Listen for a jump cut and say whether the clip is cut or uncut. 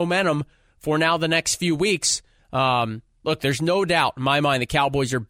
cut